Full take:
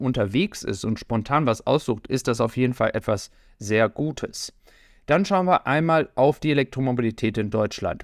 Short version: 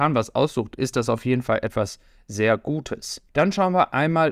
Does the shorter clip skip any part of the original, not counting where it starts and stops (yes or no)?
yes